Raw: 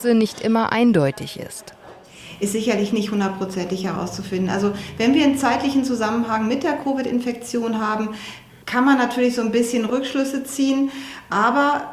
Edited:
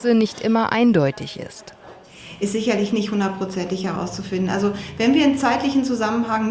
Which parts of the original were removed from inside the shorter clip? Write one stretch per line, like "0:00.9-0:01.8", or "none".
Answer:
none